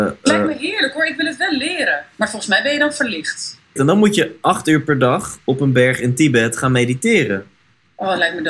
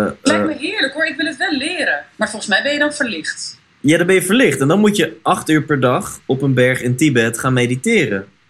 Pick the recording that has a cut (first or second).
first